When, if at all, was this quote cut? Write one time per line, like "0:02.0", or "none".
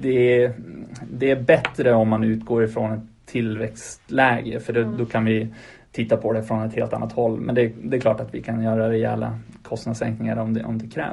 none